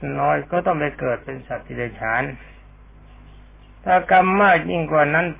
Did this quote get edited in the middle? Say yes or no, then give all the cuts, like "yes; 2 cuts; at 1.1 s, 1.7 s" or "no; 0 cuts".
no; 0 cuts